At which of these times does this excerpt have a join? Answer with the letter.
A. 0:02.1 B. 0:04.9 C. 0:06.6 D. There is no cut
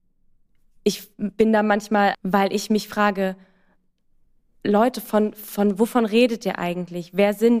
A